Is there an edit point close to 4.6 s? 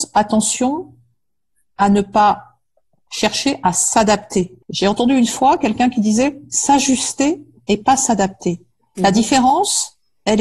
yes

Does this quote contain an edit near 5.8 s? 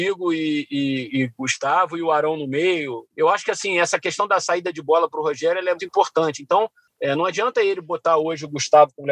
yes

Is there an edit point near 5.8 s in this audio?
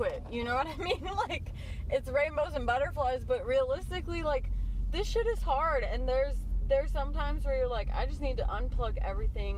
no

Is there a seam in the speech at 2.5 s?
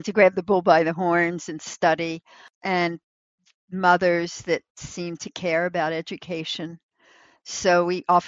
yes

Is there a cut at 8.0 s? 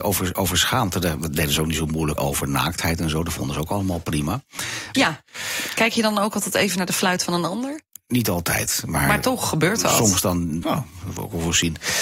no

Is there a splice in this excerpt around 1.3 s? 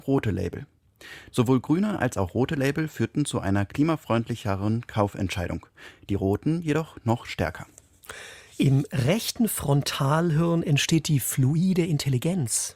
yes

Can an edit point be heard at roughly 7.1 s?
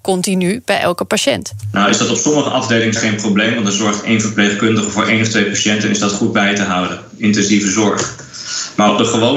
no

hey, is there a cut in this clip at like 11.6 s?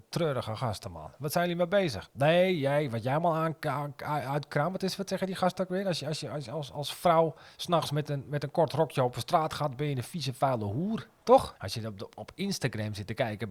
yes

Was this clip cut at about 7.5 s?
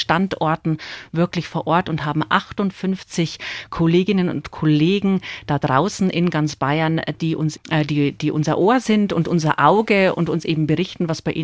yes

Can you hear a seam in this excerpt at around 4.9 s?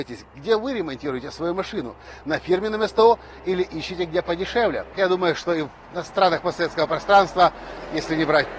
yes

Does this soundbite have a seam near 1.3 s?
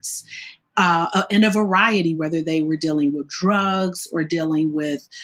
no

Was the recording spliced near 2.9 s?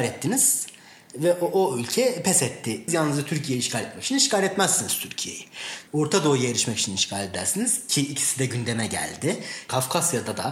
yes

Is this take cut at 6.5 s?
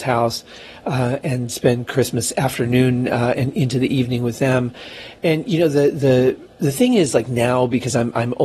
yes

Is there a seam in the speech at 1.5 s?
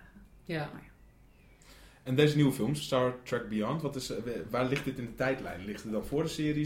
no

